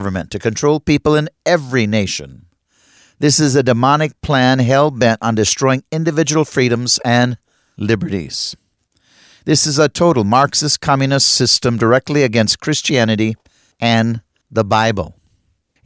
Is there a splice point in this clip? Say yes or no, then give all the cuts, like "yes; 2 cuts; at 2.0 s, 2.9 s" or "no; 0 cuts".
no; 0 cuts